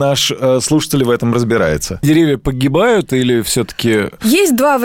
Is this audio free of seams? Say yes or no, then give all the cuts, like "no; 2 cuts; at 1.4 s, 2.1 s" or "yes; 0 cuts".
no; 1 cut; at 2.0 s